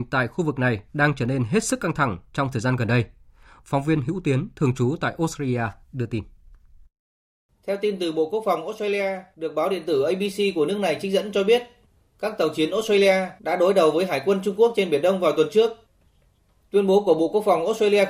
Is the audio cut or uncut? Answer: uncut